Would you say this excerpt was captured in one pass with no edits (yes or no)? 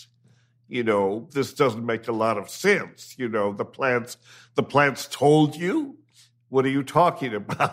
no